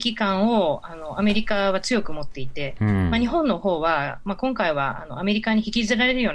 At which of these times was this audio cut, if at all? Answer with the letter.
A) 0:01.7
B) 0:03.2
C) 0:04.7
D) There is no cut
D